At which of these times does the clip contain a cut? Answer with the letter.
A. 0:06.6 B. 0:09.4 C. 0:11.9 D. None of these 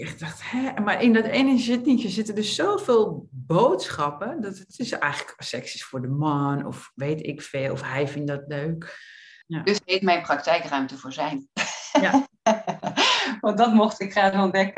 B